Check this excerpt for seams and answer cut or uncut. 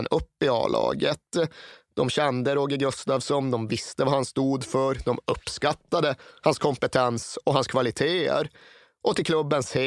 uncut